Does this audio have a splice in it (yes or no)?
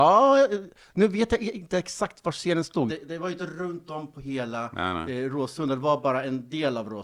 yes